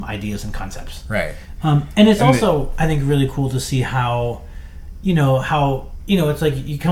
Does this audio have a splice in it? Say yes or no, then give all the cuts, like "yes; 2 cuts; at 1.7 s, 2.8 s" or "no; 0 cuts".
no; 0 cuts